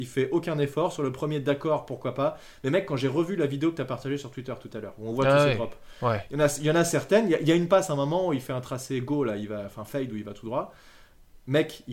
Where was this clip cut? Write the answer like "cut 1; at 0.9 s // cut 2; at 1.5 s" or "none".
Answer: none